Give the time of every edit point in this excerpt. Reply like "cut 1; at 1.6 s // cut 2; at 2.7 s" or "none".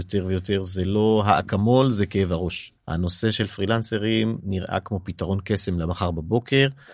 cut 1; at 2.8 s